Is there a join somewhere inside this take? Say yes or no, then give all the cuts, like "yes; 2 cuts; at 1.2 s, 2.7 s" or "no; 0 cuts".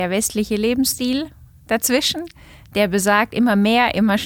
no; 0 cuts